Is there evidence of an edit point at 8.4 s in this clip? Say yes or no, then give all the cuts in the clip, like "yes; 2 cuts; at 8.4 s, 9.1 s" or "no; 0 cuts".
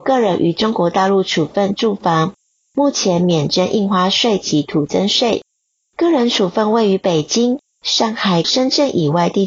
yes; 2 cuts; at 5.8 s, 8.4 s